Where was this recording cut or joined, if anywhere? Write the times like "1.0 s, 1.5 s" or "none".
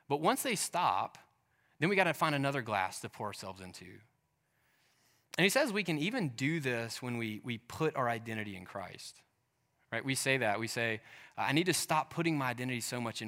none